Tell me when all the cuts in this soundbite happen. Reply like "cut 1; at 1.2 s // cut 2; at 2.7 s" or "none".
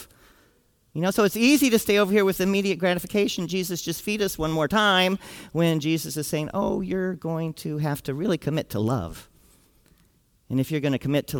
none